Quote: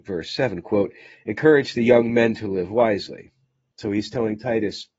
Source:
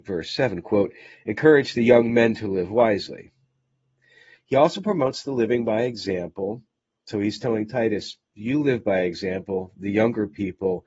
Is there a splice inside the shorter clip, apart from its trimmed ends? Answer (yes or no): yes